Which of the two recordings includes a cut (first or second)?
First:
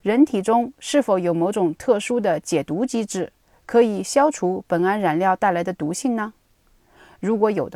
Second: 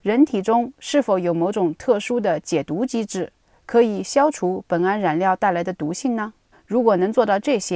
second